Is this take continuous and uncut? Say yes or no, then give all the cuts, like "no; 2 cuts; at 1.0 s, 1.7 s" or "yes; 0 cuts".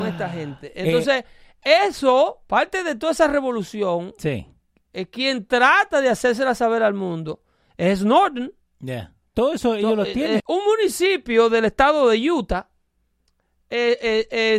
no; 2 cuts; at 9.3 s, 10.4 s